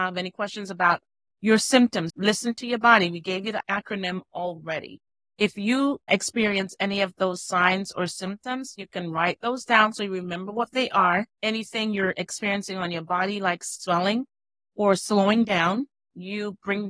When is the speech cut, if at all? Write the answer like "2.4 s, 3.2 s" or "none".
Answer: 2.1 s